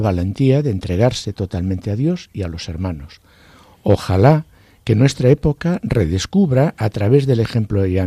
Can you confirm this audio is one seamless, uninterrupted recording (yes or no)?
yes